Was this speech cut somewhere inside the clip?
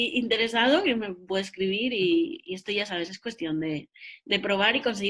no; 0 cuts

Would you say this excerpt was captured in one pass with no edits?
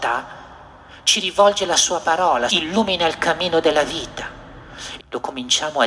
no; 2 cuts; at 2.5 s, 5.0 s

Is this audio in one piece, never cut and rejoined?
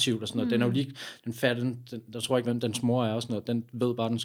no; 1 cut; at 2.4 s

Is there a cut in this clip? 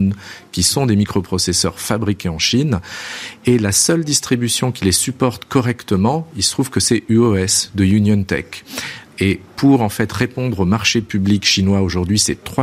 yes; 1 cut; at 9.1 s

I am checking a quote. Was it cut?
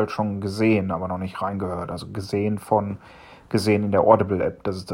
no; 0 cuts

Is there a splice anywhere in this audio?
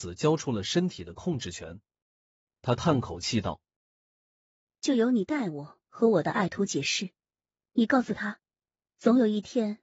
yes; 1 cut; at 2.1 s

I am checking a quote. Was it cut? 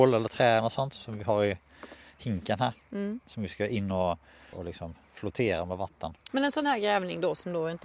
yes; 2 cuts; at 4.5 s, 6.3 s

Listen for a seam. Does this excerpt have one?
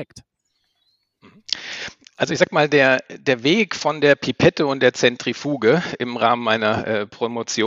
no; 0 cuts

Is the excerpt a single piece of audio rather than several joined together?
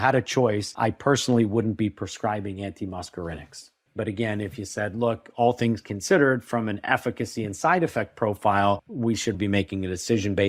no; 2 cuts; at 3.9 s, 9.3 s

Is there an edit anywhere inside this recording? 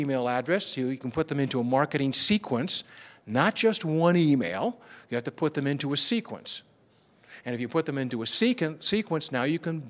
no; 0 cuts

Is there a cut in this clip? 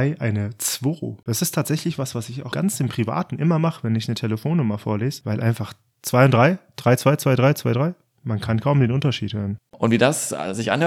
yes; 1 cut; at 9.7 s

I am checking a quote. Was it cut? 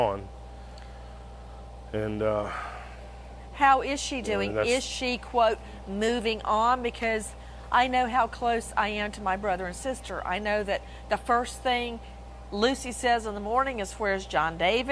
no; 0 cuts

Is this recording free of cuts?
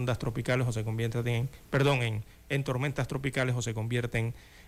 yes; 0 cuts

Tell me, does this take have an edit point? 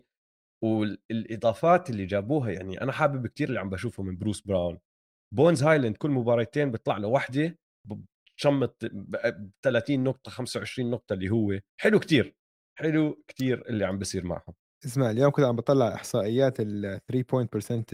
yes; 1 cut; at 11.7 s

